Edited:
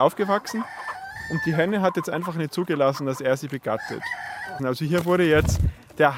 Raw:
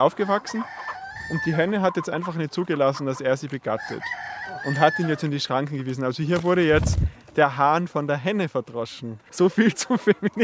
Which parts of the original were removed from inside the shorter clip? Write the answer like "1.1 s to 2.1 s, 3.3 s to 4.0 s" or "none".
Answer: 4.6 s to 6.0 s